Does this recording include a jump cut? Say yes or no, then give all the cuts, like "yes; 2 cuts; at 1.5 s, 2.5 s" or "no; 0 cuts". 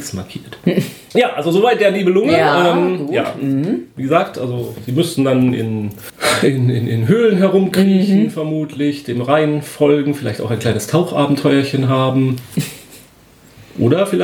no; 0 cuts